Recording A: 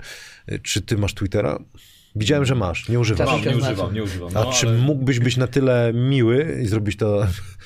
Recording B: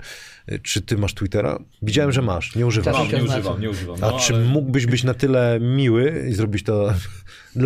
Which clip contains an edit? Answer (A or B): B